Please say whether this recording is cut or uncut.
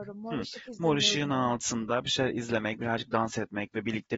uncut